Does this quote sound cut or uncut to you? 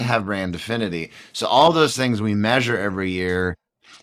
uncut